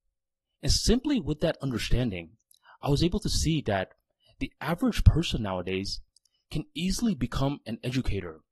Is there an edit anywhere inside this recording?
no; 0 cuts

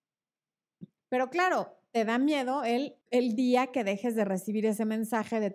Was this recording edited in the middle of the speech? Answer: yes; 2 cuts; at 1.0 s, 3.0 s

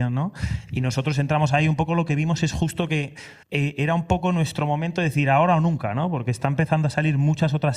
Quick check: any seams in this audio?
yes; 1 cut; at 3.4 s

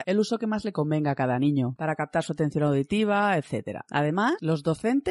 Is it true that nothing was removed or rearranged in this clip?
no; 1 cut; at 1.8 s

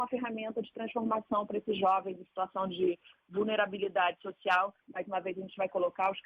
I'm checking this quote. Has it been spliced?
yes; 1 cut; at 4.8 s

